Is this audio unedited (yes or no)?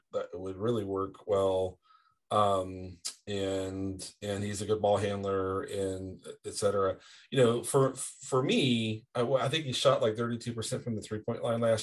yes